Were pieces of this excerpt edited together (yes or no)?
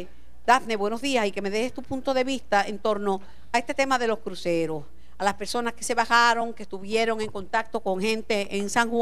no